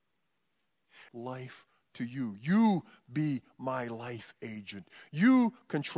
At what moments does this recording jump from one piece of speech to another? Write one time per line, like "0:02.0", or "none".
0:01.1